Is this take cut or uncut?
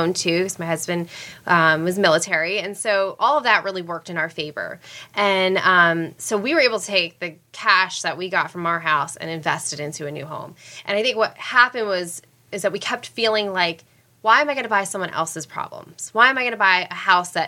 uncut